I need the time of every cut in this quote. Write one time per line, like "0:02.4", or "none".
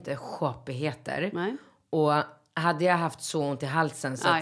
none